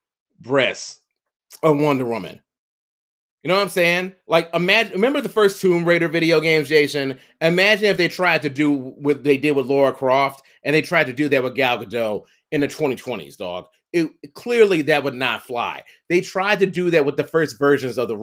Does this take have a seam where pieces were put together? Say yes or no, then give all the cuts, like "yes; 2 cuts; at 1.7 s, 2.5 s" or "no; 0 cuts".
no; 0 cuts